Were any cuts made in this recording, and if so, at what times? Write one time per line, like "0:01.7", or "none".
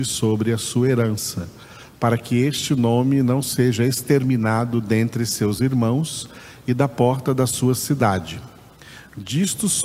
none